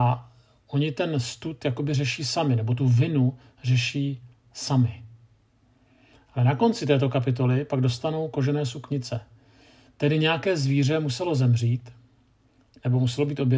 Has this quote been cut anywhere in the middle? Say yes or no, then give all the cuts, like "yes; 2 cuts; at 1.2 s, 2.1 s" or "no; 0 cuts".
no; 0 cuts